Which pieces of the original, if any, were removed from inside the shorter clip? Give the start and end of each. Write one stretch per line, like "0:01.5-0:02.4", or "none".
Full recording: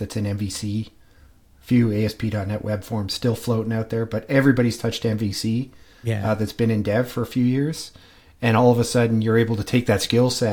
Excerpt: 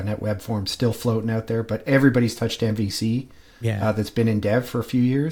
none